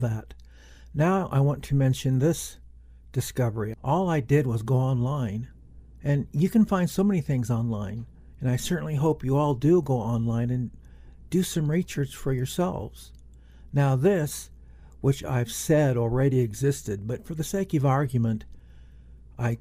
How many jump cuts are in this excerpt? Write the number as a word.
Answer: two